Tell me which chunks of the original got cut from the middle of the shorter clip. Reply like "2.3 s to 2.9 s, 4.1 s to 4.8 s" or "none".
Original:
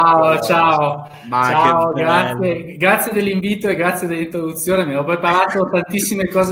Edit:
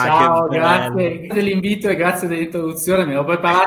2.8 s to 3.1 s